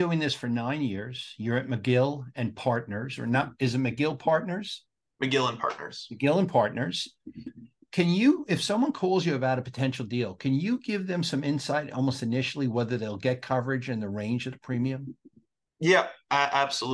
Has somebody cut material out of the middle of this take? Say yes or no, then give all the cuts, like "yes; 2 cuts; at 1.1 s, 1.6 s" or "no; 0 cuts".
no; 0 cuts